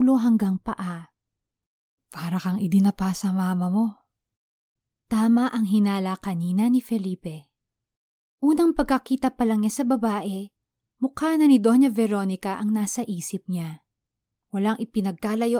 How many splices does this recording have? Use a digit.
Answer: 0